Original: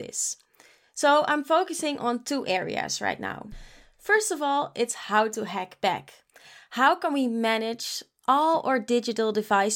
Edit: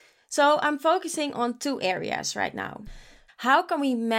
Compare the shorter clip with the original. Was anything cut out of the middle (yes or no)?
yes